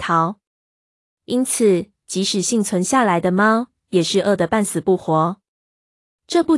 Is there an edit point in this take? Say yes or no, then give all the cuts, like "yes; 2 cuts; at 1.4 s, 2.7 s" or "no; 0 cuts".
no; 0 cuts